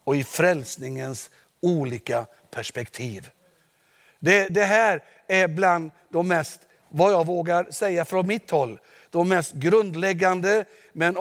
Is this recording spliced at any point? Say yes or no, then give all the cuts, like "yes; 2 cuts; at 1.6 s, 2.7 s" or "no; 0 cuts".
yes; 1 cut; at 4.5 s